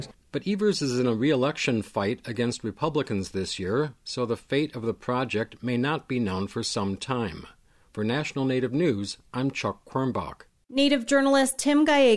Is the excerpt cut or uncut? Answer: uncut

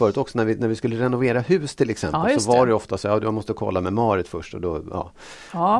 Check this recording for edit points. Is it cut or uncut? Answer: uncut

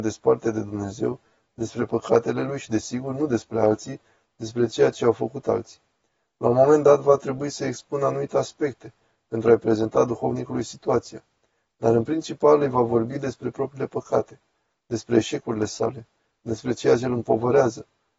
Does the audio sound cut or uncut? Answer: uncut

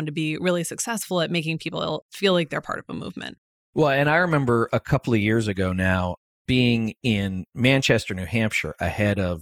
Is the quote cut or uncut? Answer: uncut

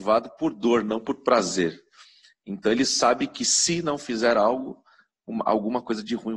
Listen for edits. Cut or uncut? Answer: uncut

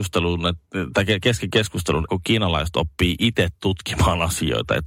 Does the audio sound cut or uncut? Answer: cut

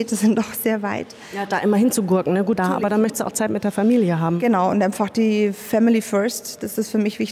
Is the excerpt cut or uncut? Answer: cut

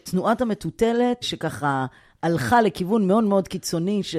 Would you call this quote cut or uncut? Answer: cut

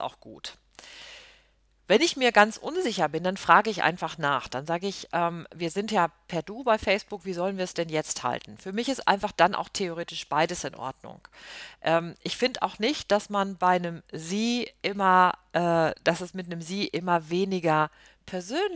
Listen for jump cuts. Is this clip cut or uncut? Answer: uncut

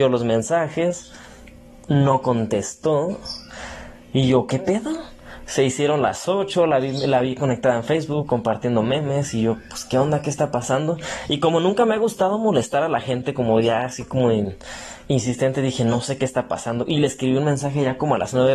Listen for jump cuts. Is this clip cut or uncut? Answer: uncut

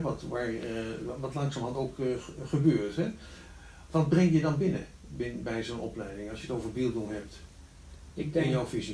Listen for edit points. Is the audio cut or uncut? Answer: cut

